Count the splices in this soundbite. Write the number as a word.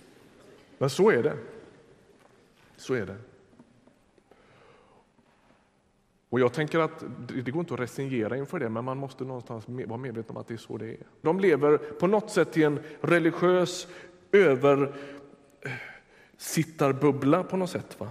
one